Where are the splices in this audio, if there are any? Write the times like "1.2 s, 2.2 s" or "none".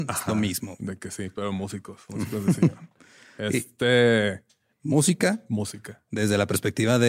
4.7 s